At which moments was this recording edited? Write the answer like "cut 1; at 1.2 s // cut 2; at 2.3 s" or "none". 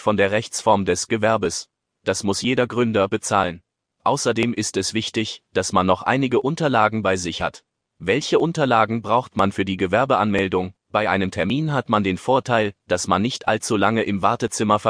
cut 1; at 10.8 s